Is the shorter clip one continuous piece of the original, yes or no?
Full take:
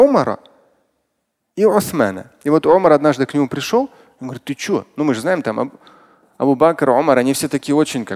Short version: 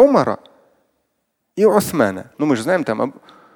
no